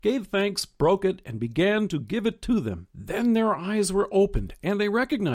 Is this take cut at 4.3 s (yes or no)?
no